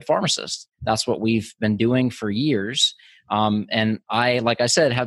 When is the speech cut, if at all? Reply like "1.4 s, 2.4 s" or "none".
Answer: none